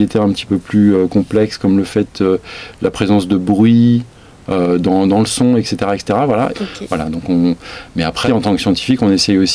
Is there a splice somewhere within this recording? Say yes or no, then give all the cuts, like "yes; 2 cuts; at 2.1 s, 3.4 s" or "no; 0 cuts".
yes; 2 cuts; at 6.5 s, 8.3 s